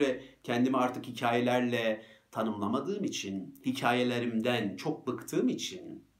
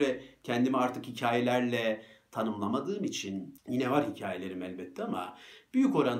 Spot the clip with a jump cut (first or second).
second